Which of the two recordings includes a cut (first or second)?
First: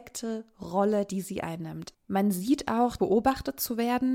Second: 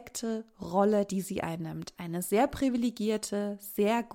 first